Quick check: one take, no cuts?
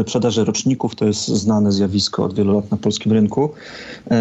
yes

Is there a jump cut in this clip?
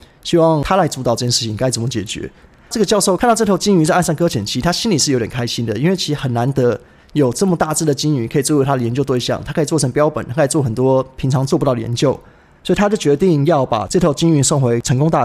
no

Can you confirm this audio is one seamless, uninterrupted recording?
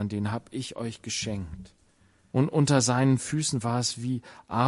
no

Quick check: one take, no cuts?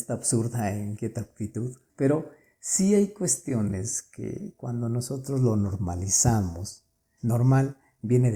no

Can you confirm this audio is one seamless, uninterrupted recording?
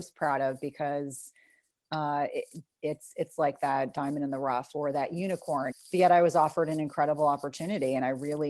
no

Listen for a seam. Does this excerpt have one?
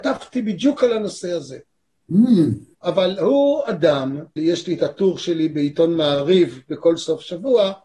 yes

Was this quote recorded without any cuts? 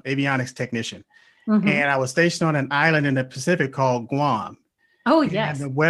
yes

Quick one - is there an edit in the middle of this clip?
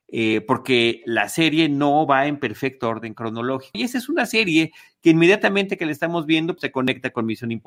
yes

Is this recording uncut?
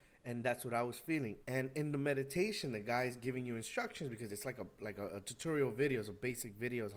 no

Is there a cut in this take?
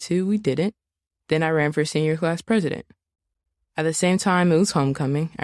no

